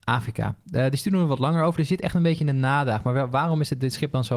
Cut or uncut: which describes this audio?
uncut